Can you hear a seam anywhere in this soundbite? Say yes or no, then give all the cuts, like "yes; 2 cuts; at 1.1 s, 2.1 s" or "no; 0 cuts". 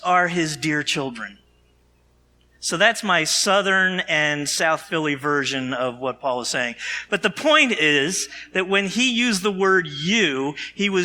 no; 0 cuts